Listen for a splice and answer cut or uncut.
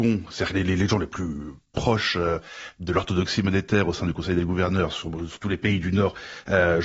uncut